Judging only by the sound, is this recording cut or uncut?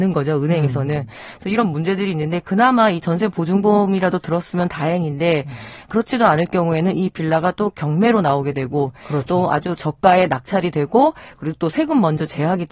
uncut